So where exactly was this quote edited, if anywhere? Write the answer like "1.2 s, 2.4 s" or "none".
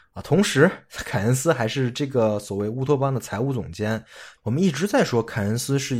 4.4 s

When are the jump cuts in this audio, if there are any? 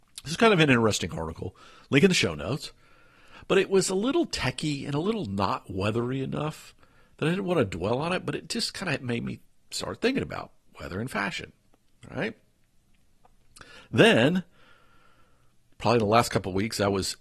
none

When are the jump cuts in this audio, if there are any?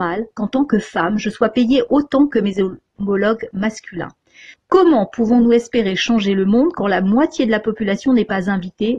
4.5 s

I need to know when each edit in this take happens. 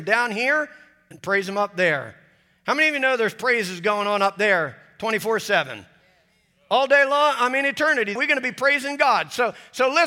8.2 s

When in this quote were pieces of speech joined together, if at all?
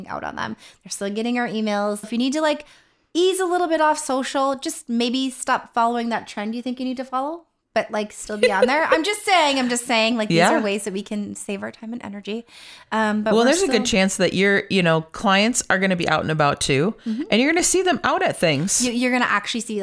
2.0 s

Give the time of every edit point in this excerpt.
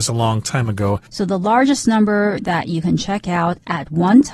1.1 s

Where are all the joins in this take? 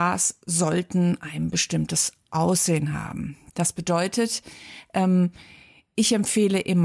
3.5 s

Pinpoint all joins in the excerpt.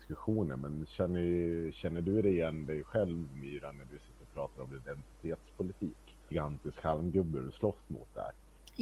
6.3 s

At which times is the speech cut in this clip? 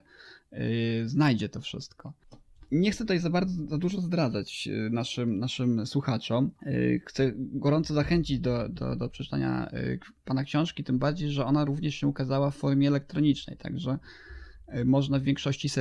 6.6 s

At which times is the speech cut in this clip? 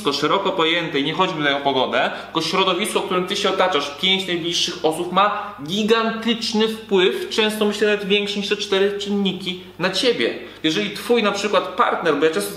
10.6 s

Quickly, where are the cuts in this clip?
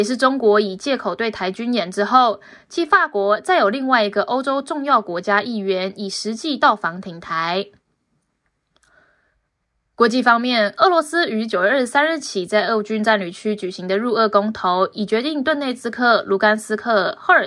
none

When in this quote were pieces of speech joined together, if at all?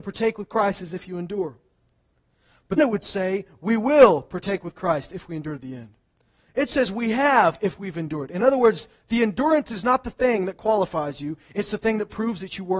2.8 s

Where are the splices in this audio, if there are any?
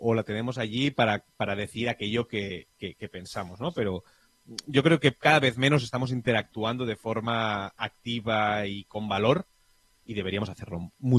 none

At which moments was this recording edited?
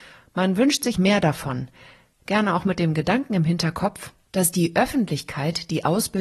0.9 s

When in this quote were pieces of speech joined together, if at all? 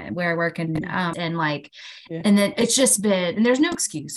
1.1 s

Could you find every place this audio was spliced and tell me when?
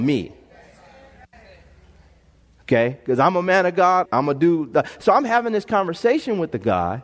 4.0 s

